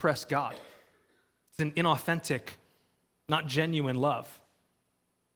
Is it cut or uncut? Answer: uncut